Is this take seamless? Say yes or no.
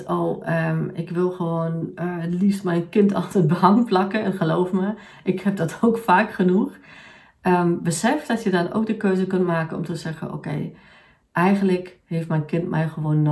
yes